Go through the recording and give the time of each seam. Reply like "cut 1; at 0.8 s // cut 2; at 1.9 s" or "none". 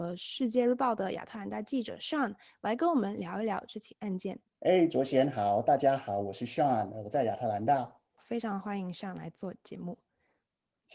cut 1; at 4.5 s